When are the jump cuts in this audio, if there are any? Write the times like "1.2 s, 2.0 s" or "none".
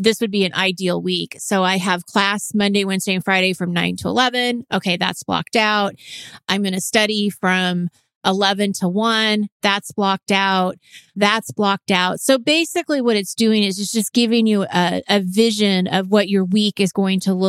11.1 s